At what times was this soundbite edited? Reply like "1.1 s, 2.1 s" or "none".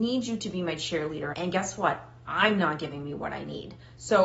1.3 s